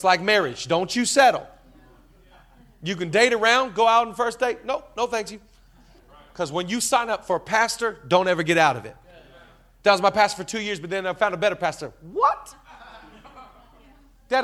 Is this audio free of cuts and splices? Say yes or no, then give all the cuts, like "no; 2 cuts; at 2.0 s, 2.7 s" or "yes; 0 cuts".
yes; 0 cuts